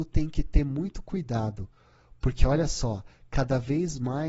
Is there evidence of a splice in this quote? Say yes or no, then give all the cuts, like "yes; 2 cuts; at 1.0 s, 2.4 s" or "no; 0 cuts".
no; 0 cuts